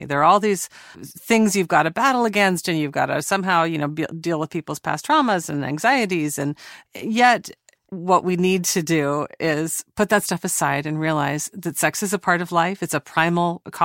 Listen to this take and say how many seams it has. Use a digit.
2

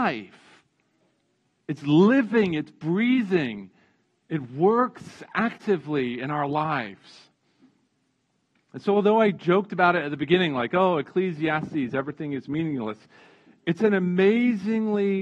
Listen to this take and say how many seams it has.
0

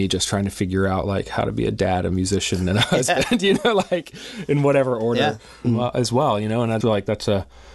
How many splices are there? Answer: 2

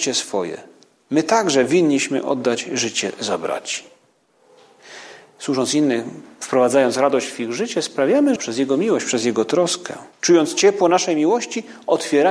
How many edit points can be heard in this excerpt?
2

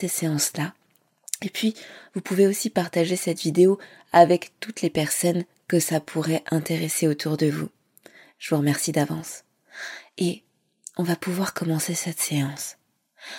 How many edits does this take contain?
0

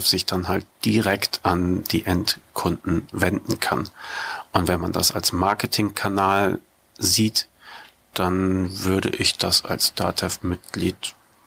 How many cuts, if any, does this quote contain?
0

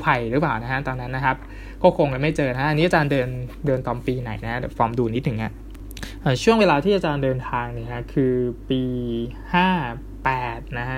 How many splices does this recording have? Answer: 0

